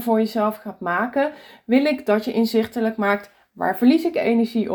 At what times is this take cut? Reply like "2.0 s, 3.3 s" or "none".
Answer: none